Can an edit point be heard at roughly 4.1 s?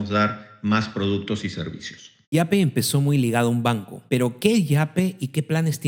yes; 2 cuts; at 2.2 s, 4.1 s

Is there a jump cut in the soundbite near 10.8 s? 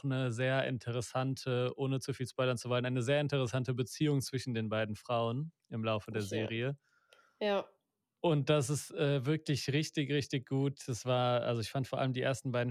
no; 0 cuts

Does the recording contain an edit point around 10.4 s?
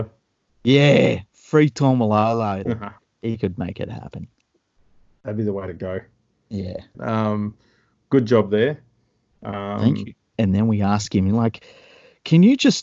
yes; 3 cuts; at 2.6 s, 6.9 s, 10.4 s

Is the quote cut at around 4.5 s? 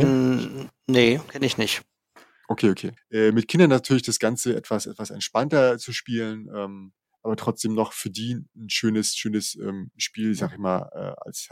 no; 1 cut; at 3.0 s

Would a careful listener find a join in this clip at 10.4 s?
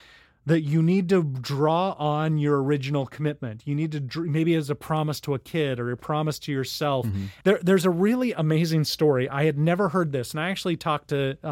no; 1 cut; at 7.4 s

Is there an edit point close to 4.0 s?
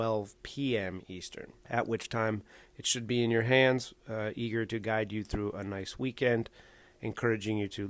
no; 1 cut; at 1.6 s

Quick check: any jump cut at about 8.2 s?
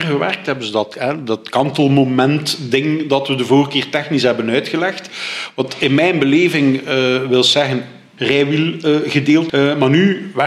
yes; 2 cuts; at 8.2 s, 9.5 s

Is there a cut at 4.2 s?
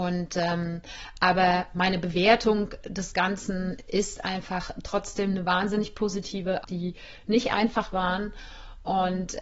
no; 1 cut; at 6.6 s

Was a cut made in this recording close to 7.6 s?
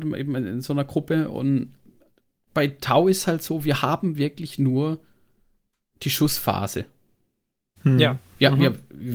no; 0 cuts

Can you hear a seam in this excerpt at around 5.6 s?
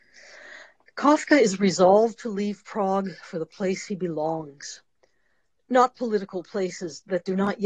no; 0 cuts

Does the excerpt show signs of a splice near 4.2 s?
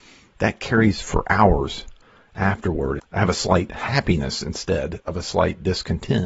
no; 1 cut; at 3.0 s

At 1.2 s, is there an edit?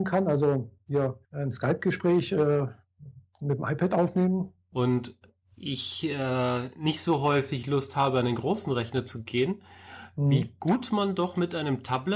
yes; 2 cuts; at 1.2 s, 4.7 s

